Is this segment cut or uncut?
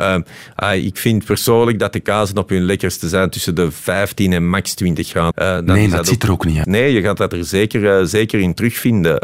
cut